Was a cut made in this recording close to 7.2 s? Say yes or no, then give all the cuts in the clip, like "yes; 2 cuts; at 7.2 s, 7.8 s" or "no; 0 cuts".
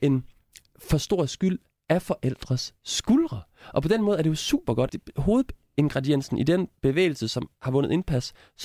no; 1 cut; at 4.9 s